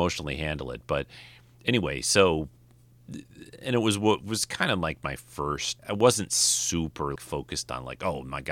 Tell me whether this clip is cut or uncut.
cut